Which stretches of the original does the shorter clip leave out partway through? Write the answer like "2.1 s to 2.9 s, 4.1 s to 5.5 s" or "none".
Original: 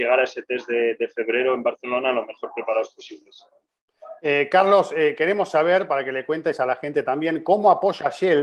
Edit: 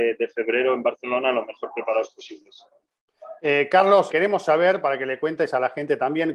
4.9 s to 5.1 s